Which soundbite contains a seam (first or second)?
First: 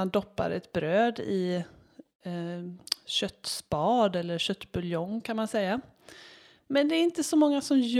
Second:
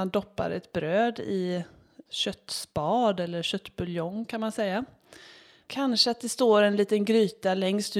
second